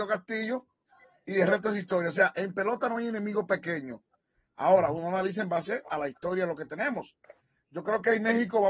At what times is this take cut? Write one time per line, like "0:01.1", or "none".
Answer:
none

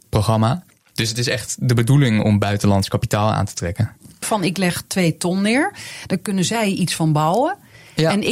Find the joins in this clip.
0:02.2
0:04.2

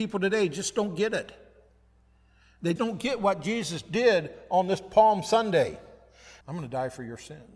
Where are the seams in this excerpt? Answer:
0:02.8
0:06.4

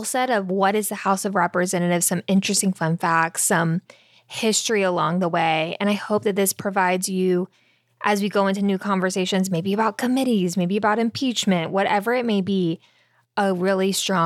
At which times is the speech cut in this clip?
none

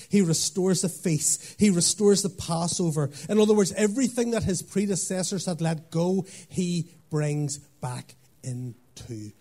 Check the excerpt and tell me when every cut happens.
none

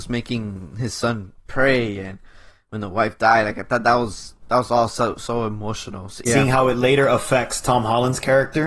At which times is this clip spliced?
0:01.5
0:06.3

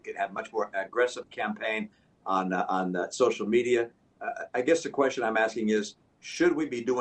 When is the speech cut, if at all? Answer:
none

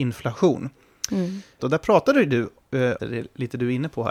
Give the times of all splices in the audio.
0:01.6
0:03.0

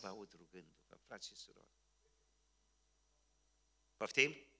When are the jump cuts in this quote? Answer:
none

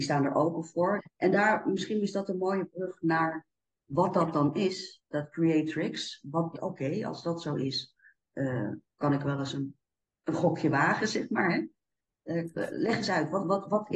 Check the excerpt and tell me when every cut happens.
0:01.0
0:06.5

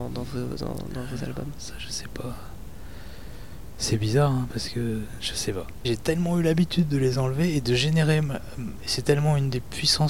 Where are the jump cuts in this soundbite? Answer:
0:05.8
0:08.8

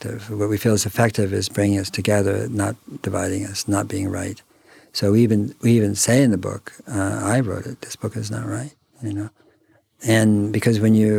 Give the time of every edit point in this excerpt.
0:07.8

